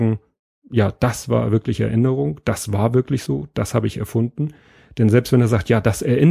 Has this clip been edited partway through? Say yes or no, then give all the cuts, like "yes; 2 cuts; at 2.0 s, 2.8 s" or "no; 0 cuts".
no; 0 cuts